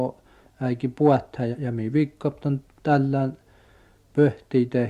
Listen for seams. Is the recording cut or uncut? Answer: cut